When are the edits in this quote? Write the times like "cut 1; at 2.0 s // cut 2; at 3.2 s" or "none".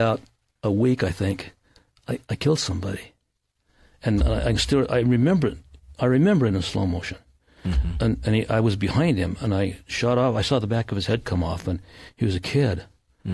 none